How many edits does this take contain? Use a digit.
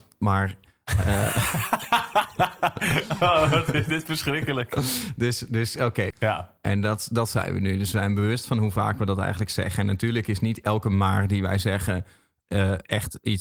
1